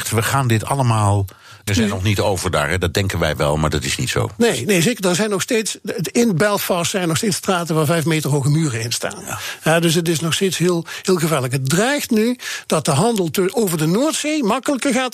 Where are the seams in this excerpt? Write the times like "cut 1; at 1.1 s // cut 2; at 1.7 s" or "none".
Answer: cut 1; at 1.7 s